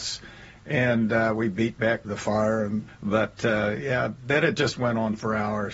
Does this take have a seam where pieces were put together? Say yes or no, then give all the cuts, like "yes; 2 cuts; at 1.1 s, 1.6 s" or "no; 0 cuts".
no; 0 cuts